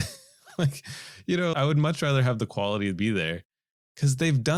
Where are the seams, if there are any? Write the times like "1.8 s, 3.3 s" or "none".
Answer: 1.5 s